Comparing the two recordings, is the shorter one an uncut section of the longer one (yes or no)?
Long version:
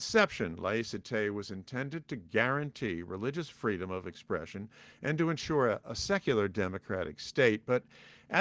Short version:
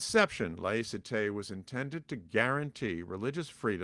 yes